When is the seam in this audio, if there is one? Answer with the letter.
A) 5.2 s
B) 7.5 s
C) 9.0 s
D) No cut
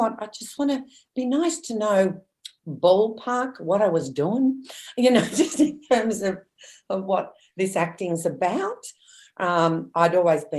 D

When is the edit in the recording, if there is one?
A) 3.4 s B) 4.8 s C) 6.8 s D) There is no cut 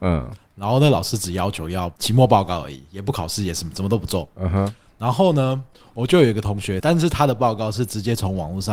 C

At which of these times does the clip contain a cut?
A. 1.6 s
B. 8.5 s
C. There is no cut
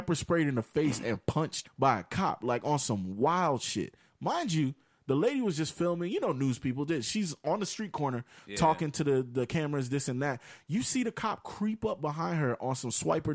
A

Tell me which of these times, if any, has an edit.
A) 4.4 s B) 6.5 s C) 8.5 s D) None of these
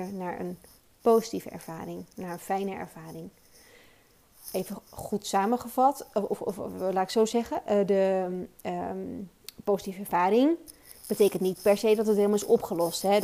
D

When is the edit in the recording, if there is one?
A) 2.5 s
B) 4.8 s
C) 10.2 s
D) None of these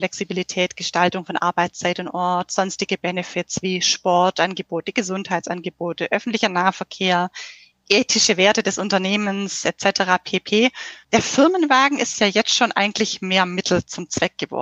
D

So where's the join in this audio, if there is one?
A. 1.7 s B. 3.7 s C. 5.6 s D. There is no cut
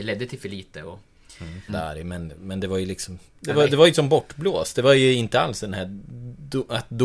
A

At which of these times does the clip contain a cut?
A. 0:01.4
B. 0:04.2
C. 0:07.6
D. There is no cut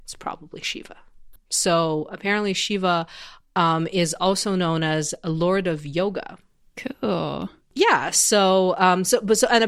A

